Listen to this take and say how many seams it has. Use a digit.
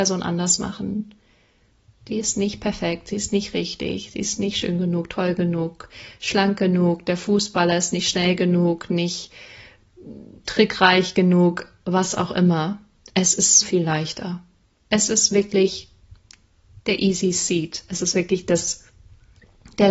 1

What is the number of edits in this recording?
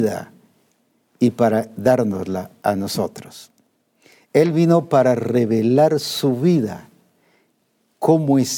0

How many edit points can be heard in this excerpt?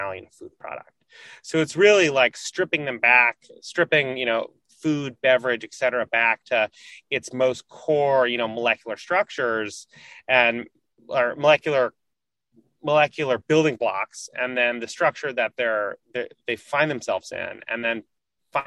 0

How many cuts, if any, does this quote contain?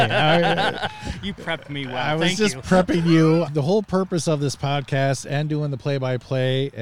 1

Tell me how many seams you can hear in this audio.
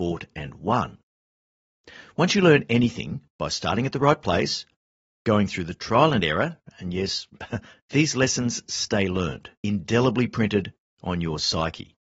2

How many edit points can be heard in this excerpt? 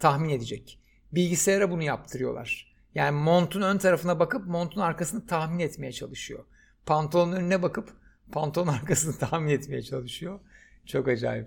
0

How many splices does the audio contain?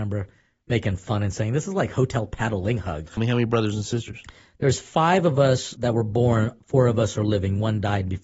1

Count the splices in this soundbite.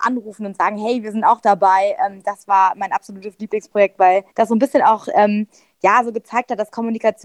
1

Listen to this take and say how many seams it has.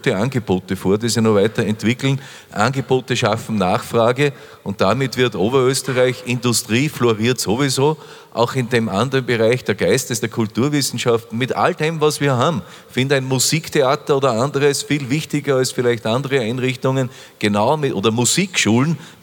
0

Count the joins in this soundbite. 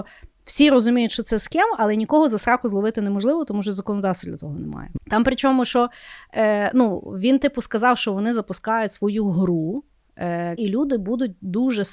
2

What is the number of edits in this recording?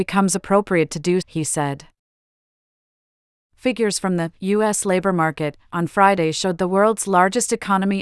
1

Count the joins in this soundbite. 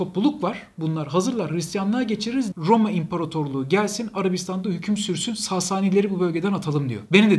1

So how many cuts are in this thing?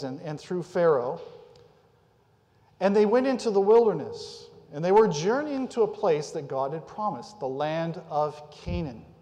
0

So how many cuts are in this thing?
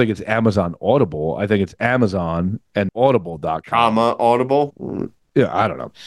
1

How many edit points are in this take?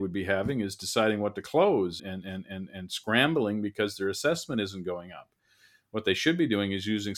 1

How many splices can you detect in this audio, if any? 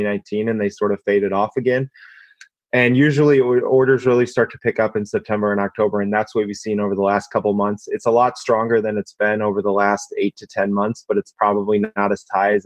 0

